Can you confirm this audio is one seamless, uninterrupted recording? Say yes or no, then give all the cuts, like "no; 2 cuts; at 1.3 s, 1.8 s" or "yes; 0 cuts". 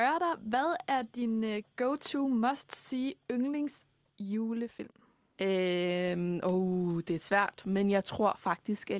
yes; 0 cuts